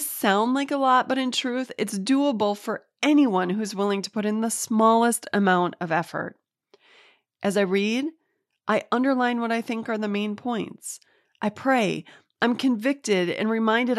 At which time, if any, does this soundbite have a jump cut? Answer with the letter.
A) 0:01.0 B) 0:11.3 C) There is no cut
B